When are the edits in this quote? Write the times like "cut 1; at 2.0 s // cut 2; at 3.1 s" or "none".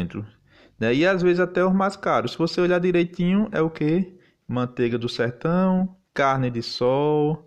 cut 1; at 6.1 s